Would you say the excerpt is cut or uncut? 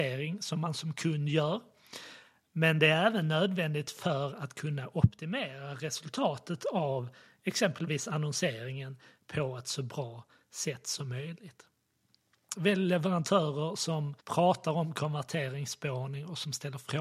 cut